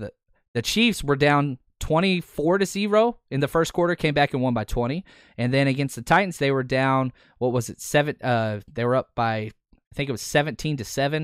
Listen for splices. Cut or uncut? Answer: uncut